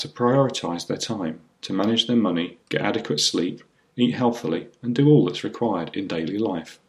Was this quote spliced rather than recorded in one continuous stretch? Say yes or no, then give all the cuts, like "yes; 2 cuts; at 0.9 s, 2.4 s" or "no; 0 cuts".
yes; 1 cut; at 2.6 s